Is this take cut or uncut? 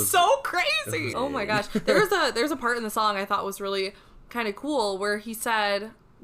cut